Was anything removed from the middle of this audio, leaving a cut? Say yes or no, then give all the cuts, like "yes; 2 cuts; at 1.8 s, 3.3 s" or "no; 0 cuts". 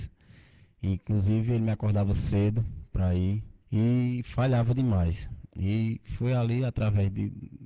yes; 1 cut; at 3.6 s